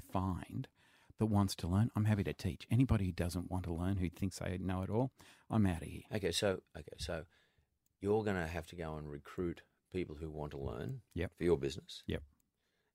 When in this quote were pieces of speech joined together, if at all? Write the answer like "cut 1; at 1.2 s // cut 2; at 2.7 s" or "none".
none